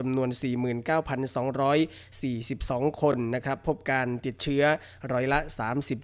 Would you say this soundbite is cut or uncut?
uncut